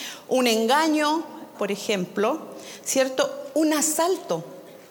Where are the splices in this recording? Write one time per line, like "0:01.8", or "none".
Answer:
0:01.5